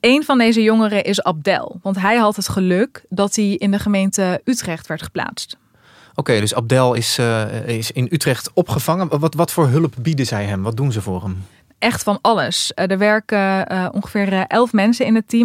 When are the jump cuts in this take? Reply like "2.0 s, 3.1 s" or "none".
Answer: none